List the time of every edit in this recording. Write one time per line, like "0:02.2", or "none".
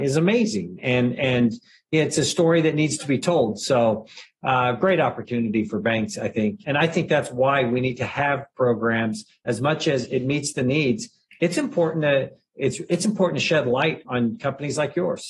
0:06.6
0:14.0